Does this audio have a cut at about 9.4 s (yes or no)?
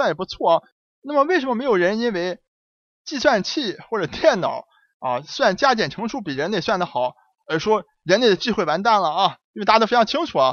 yes